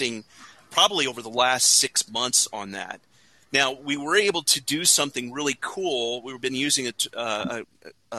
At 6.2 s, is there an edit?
no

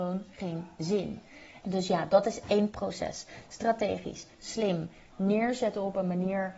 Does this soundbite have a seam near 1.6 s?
yes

